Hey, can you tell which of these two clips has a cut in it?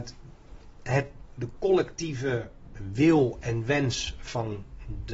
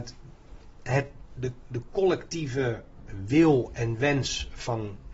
first; 1 cut; at 1.3 s

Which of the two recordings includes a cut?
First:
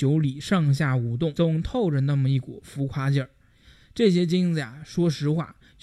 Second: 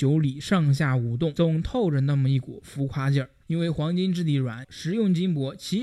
second; 2 cuts; at 3.4 s, 4.6 s

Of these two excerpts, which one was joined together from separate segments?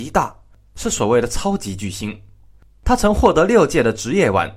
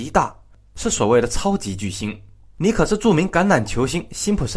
second; 1 cut; at 2.6 s

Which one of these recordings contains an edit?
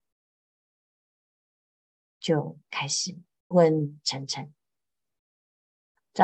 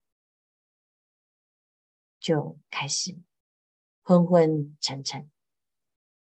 first; 1 cut; at 3.5 s

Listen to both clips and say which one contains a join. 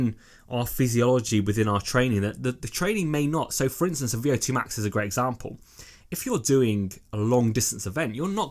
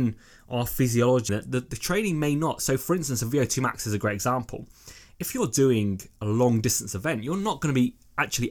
second; 1 cut; at 1.3 s

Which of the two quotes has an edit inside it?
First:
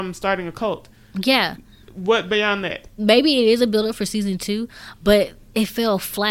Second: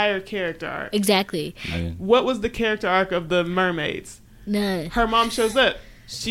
first; 1 cut; at 3.0 s

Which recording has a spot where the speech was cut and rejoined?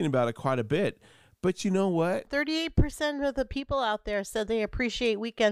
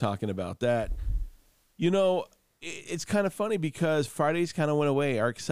first; 1 cut; at 2.3 s

